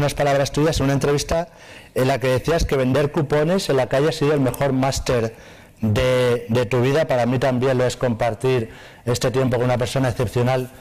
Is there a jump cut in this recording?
no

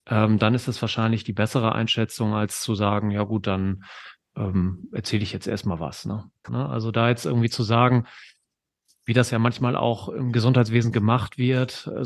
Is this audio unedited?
no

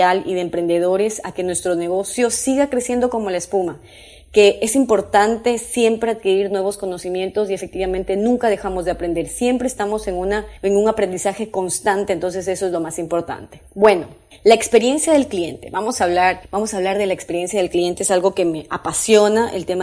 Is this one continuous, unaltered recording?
yes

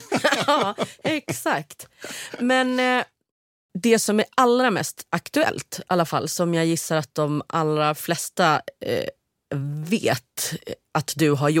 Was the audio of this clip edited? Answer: no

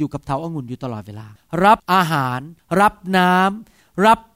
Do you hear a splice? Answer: no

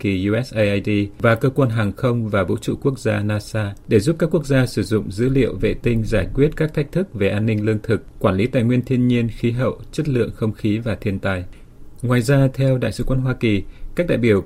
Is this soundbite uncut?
yes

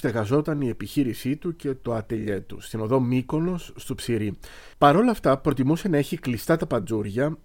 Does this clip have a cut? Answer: yes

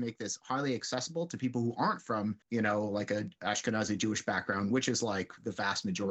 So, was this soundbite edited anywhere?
yes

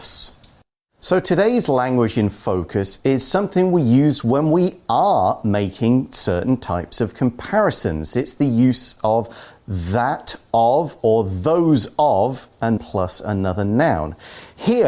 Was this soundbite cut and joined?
yes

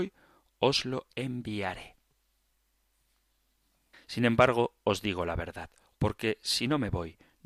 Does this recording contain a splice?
yes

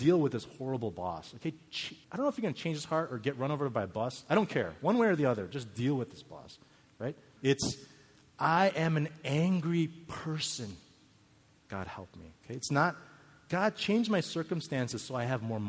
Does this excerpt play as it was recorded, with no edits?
no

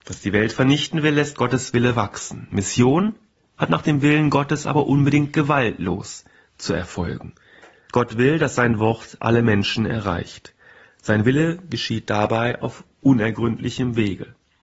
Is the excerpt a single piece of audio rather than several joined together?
no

